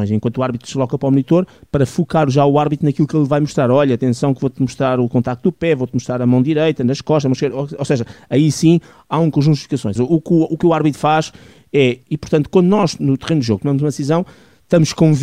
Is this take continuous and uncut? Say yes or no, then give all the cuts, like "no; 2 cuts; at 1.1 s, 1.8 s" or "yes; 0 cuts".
no; 2 cuts; at 10.0 s, 12.0 s